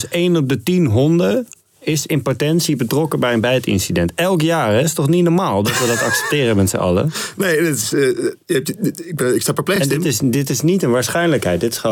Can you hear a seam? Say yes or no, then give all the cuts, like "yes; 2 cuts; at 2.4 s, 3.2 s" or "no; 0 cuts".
no; 0 cuts